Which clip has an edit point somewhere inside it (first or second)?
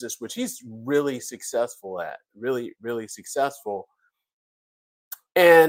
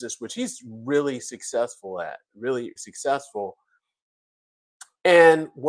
second